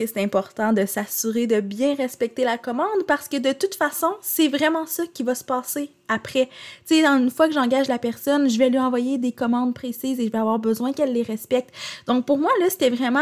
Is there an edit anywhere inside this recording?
no; 0 cuts

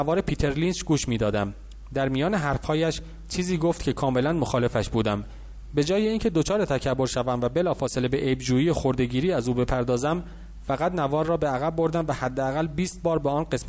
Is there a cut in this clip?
no; 0 cuts

